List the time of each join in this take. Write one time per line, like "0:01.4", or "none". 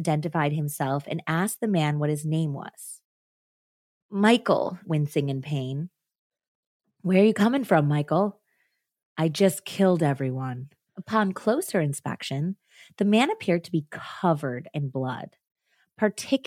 0:04.8
0:10.9